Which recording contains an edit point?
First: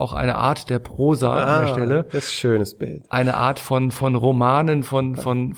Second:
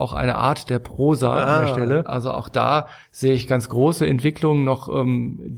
second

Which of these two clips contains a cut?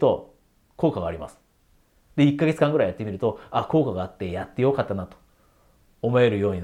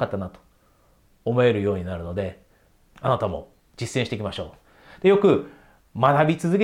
second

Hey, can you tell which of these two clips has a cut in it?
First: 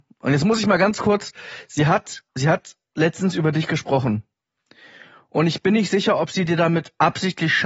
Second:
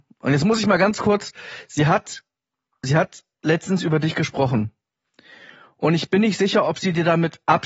first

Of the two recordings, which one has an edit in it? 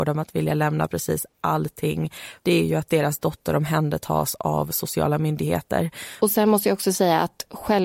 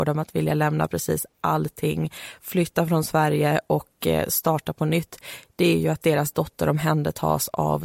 first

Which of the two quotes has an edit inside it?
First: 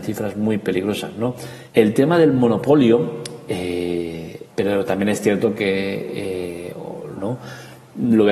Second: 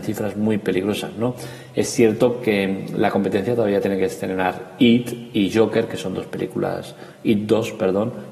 first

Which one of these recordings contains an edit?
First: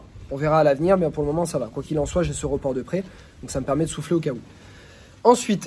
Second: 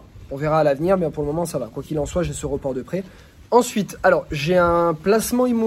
second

